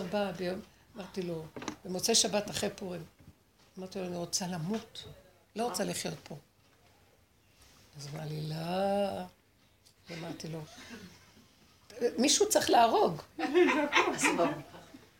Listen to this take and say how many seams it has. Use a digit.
0